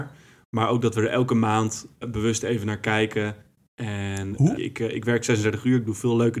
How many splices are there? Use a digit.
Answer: 2